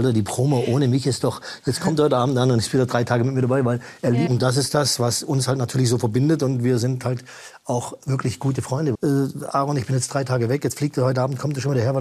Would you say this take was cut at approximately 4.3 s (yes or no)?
yes